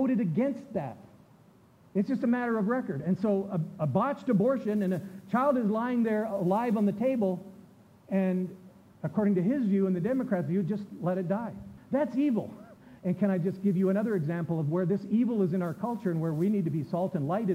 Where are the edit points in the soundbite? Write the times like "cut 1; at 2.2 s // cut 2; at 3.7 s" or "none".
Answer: cut 1; at 11.8 s // cut 2; at 13.0 s